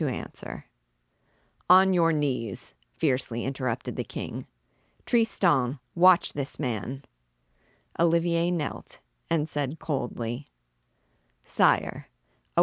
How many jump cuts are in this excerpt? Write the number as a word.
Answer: zero